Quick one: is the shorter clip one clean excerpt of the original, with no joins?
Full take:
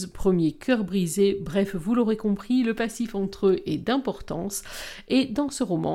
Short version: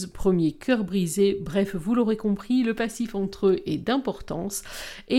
yes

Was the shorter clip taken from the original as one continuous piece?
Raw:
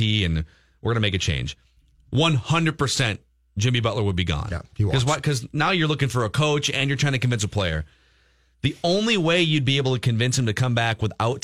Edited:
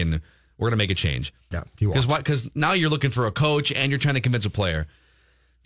no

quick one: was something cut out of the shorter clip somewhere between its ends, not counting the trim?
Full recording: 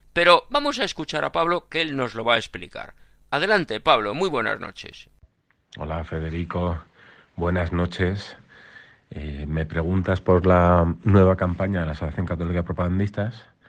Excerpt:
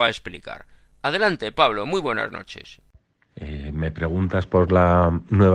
yes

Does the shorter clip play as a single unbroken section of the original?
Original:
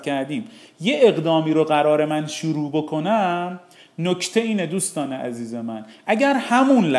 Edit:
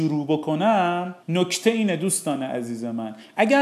no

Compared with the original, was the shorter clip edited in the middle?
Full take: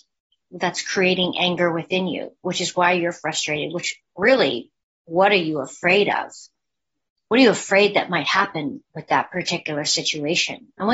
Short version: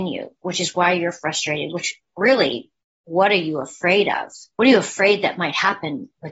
yes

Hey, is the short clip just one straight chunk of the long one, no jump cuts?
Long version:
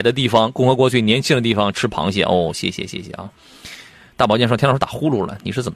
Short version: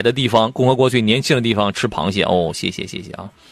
yes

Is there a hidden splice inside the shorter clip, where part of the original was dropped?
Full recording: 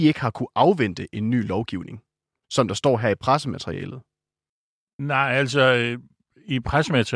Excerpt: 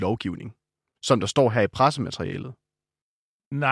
no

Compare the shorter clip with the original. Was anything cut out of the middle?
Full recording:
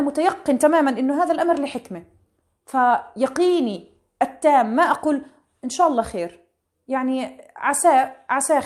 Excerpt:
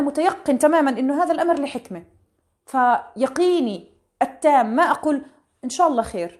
no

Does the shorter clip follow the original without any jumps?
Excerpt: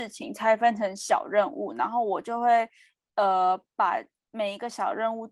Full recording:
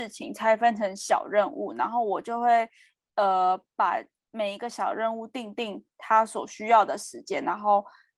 yes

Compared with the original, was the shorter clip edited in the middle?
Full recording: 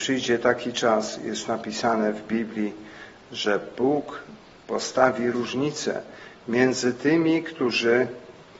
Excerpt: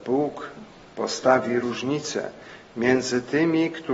no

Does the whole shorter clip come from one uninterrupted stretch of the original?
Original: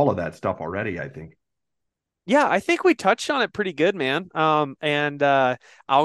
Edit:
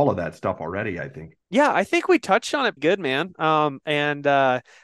no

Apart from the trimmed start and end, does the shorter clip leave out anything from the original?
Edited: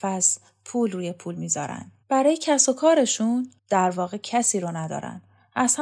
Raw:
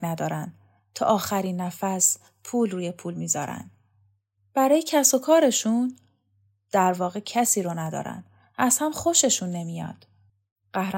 yes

